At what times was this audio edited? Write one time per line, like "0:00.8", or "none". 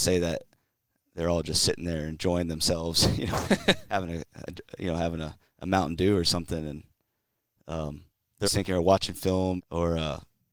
0:08.4
0:09.6